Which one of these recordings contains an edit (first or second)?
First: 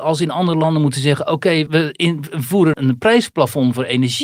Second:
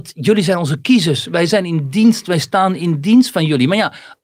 first